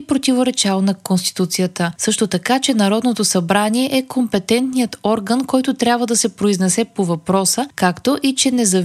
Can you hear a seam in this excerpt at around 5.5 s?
no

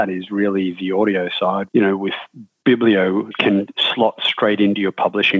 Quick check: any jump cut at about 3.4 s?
no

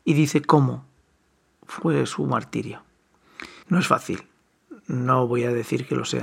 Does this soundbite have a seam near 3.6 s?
yes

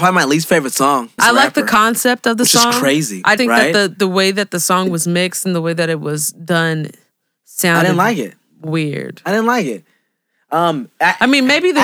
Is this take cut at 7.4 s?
no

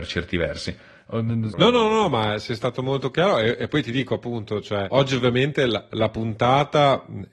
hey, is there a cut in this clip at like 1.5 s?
yes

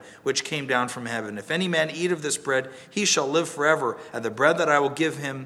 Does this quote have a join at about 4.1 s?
no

